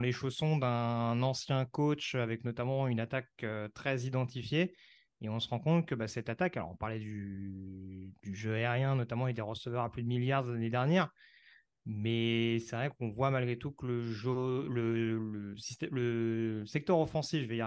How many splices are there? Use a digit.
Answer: 0